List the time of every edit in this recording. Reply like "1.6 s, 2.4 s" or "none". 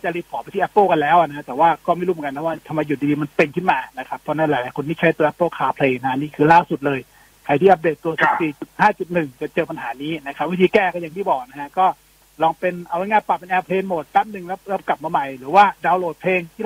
none